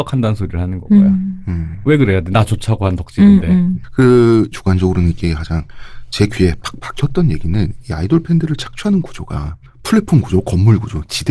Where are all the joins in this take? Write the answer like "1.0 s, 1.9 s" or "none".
4.5 s

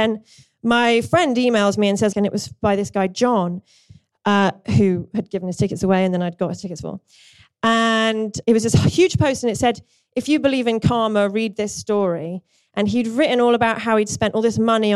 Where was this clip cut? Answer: 2.1 s

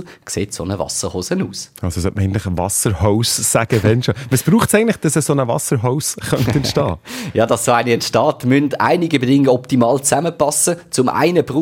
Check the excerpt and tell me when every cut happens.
none

